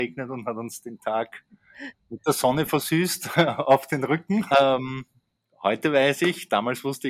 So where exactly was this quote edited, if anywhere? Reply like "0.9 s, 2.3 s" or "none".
4.5 s